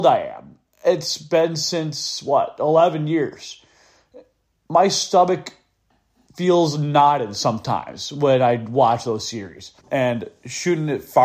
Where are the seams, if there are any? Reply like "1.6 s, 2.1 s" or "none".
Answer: 9.8 s